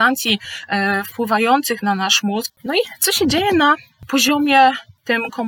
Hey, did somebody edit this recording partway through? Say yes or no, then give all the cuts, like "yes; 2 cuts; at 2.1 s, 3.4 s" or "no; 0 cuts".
yes; 1 cut; at 2.5 s